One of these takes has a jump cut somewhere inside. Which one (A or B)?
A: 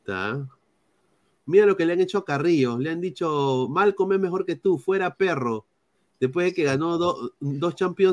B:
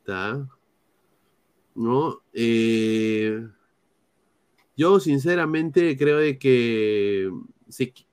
A